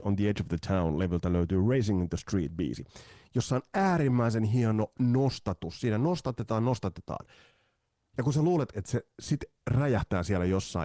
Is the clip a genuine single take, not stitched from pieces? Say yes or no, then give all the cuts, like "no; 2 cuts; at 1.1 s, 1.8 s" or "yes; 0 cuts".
yes; 0 cuts